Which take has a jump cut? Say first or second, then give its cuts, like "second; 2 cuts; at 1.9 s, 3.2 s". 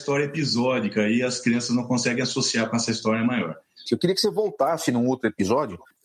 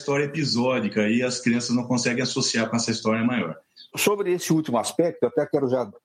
first; 1 cut; at 3.9 s